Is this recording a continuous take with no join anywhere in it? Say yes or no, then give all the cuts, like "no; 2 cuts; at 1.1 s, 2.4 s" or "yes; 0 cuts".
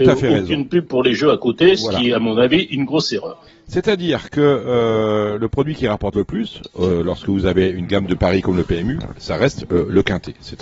yes; 0 cuts